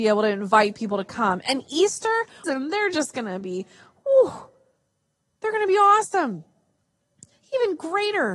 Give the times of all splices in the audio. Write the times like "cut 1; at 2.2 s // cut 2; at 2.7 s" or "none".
cut 1; at 2.4 s